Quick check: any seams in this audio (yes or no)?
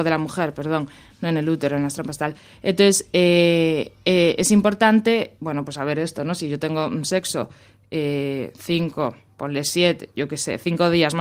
no